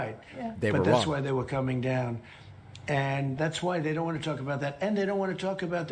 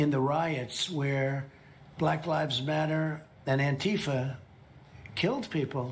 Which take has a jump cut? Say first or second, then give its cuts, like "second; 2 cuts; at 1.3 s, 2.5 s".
first; 1 cut; at 3.4 s